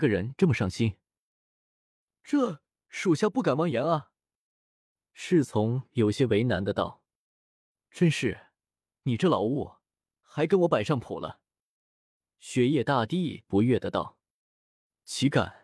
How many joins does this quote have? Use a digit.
0